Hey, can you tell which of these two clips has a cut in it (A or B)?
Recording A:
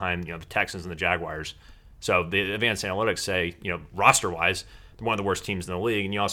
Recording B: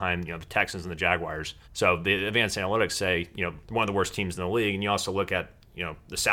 B